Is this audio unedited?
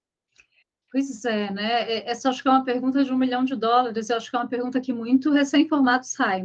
yes; 0 cuts

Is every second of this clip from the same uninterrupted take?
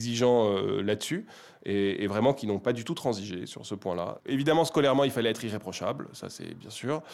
no; 1 cut; at 4.2 s

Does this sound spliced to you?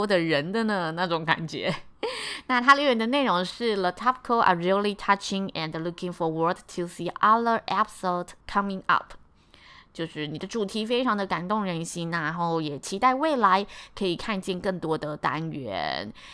yes; 1 cut; at 8.4 s

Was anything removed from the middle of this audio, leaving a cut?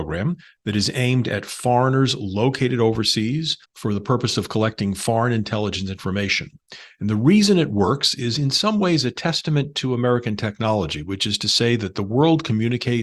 yes; 1 cut; at 3.6 s

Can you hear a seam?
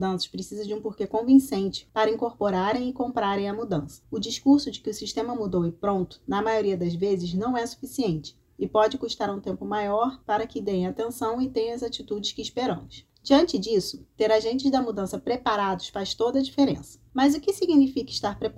no; 0 cuts

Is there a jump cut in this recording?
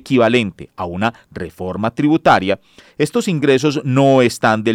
no; 0 cuts

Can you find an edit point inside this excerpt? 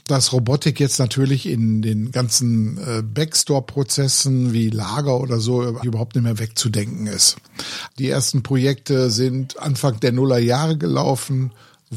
yes; 2 cuts; at 5.8 s, 7.9 s

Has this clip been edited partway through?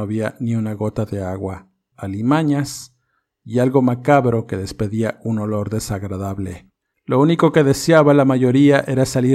yes; 2 cuts; at 1.9 s, 6.9 s

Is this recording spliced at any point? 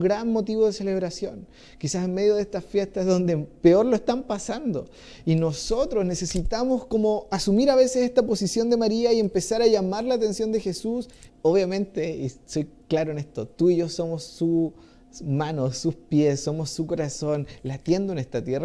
yes; 1 cut; at 11.3 s

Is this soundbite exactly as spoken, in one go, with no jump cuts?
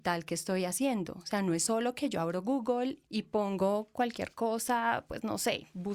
no; 1 cut; at 3.1 s

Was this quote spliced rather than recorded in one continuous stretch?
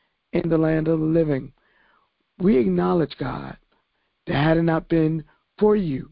no; 0 cuts

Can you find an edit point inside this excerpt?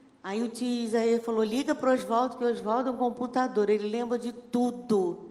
no; 0 cuts

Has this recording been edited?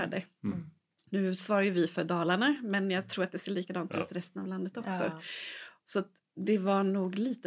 no; 0 cuts

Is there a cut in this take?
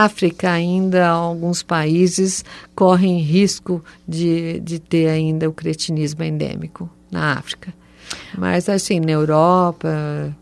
no; 0 cuts

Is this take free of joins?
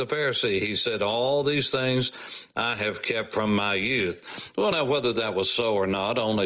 yes; 0 cuts

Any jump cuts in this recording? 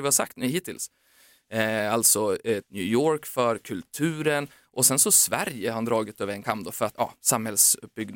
yes; 2 cuts; at 2.6 s, 6.9 s

